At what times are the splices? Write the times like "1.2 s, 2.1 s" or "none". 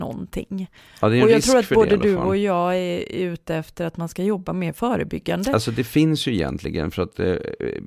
none